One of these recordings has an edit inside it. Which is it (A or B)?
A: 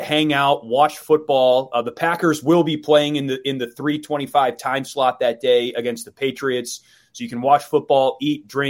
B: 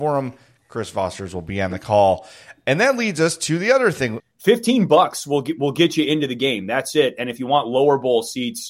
B